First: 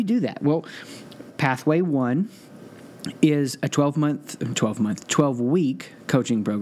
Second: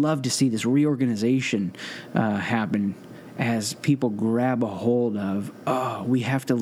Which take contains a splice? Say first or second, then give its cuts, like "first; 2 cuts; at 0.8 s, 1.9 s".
first; 1 cut; at 1.3 s